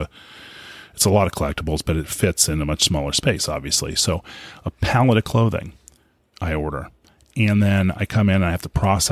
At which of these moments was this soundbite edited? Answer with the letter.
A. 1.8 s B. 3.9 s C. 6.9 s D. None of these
D